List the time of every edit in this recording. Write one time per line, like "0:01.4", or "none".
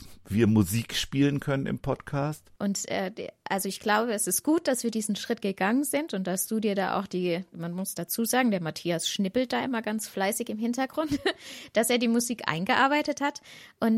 0:02.6